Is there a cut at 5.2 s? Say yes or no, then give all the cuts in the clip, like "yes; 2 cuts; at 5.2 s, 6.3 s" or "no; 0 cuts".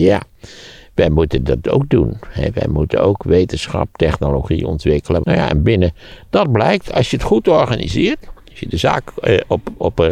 yes; 1 cut; at 5.2 s